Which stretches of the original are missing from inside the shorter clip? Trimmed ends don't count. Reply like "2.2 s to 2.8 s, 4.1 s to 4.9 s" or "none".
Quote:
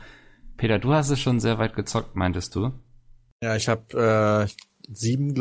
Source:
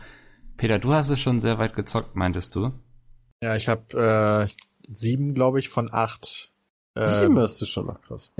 none

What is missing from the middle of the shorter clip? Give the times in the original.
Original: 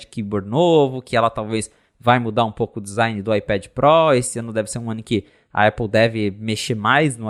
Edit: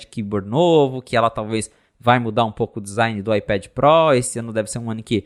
none

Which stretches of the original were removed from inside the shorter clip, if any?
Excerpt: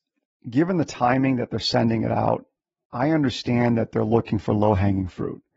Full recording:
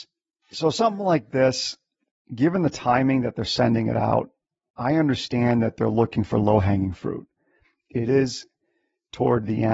none

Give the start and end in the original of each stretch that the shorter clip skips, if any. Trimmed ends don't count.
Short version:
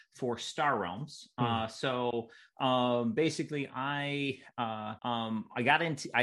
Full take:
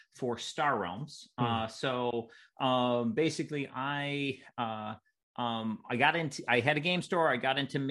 5.0 s to 5.3 s

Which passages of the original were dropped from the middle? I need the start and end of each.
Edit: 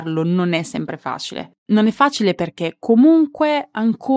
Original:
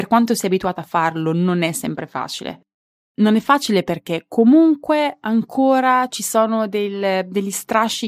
2.7 s to 3.1 s

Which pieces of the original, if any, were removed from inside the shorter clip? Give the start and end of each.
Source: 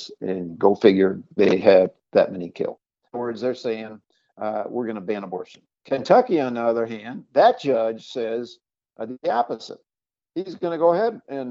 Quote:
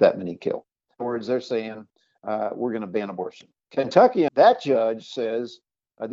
6.4 s to 7.3 s

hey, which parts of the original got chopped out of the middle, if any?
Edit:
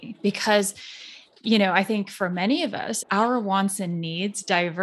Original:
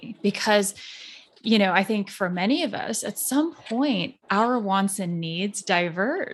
3.0 s to 4.2 s

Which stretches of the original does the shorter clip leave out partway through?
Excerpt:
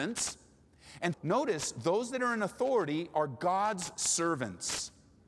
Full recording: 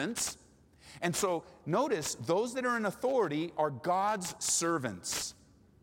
1.1 s to 1.6 s

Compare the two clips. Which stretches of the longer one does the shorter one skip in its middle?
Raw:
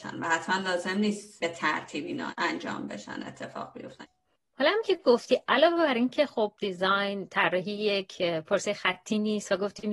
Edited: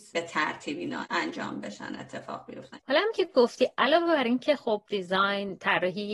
4.1 s to 4.5 s

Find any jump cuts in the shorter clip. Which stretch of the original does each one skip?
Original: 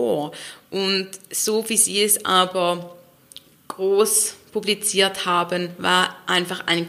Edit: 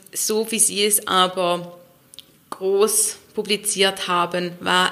none

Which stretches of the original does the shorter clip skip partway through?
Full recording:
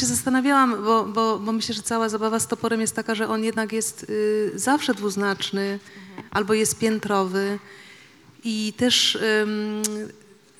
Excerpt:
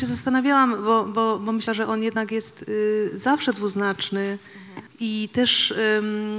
1.7 s to 3.1 s, 6.3 s to 8.3 s

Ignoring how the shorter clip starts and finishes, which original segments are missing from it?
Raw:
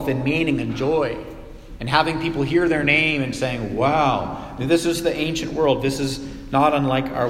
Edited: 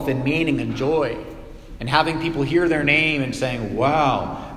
none

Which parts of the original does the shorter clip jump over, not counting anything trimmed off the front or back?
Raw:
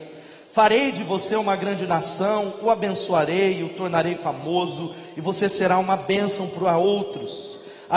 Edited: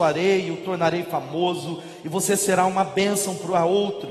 none

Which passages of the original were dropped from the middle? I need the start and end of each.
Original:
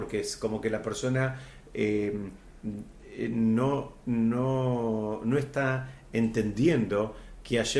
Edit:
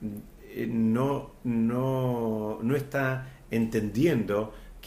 none

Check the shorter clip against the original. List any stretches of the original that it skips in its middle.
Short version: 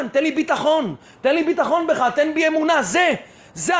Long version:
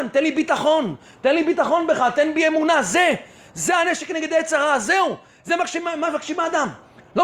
none

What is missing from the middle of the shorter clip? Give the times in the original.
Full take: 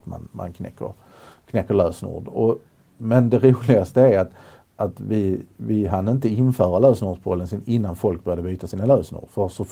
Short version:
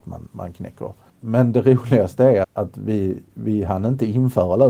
1.1 s to 2.9 s, 4.2 s to 4.7 s

